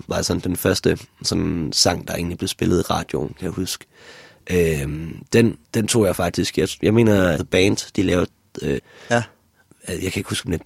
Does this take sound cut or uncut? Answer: cut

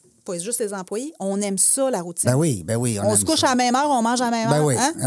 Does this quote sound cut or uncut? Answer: uncut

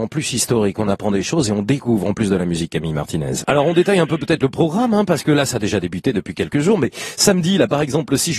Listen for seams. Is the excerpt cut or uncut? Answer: cut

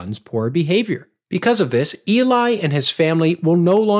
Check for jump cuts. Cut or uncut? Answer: uncut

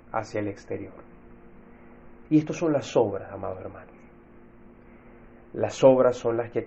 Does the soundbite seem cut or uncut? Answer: cut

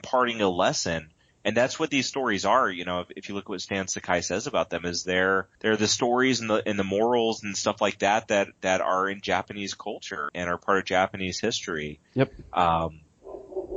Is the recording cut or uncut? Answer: cut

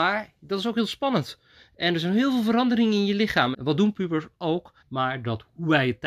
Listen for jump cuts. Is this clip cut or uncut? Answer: cut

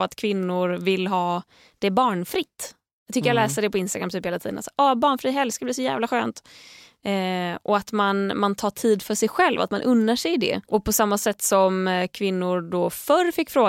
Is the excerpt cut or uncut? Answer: cut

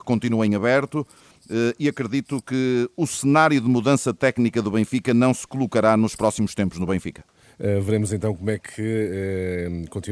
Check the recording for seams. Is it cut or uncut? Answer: uncut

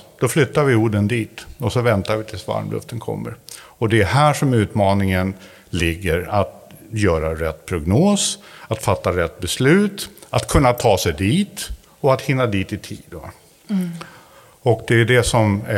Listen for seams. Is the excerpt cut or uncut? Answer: uncut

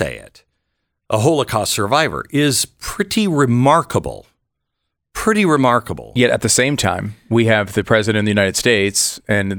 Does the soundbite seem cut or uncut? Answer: uncut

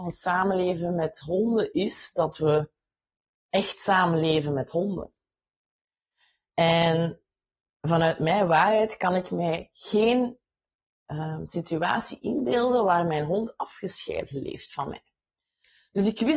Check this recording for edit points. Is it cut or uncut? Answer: uncut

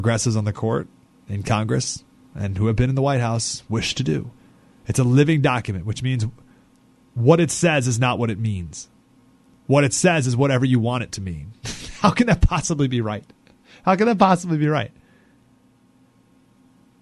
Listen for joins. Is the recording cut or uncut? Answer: uncut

